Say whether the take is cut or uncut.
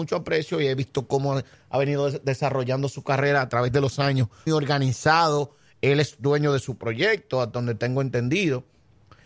cut